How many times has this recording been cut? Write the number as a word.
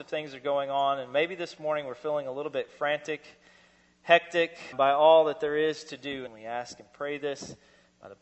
two